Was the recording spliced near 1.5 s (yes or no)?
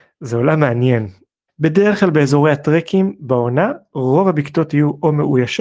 yes